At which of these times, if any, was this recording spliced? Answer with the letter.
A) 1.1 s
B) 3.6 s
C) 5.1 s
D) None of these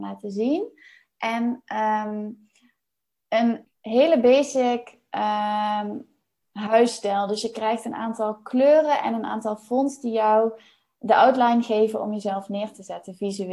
B